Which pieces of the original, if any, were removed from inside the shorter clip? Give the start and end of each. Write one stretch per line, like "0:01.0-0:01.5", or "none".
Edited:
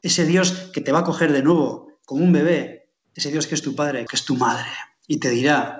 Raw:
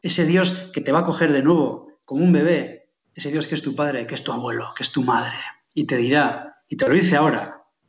0:04.1-0:04.7